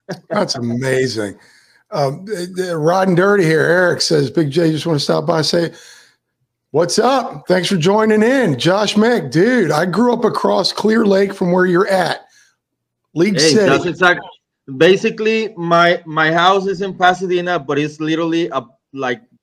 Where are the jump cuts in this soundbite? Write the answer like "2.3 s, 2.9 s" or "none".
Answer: none